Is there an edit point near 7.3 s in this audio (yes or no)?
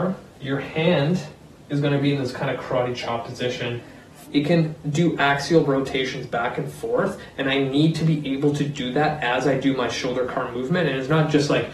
no